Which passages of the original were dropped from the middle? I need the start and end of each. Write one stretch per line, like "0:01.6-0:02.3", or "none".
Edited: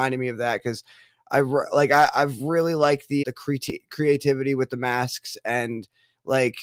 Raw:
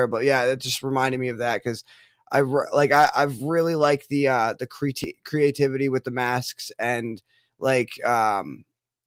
0:04.2-0:04.6